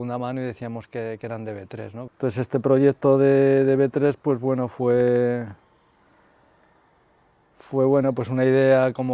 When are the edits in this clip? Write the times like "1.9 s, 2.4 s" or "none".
2.1 s